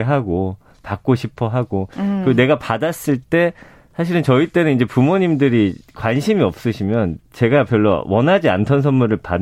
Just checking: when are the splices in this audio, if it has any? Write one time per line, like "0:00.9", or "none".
none